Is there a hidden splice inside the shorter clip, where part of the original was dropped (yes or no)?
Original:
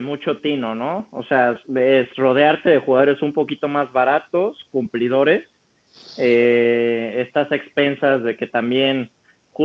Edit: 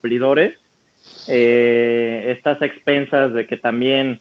no